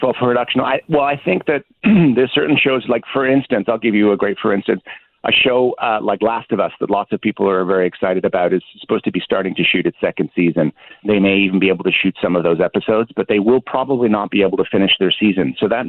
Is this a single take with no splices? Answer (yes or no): no